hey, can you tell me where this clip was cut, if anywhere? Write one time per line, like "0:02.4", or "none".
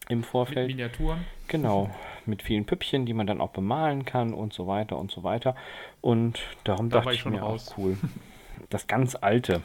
0:06.0
0:08.6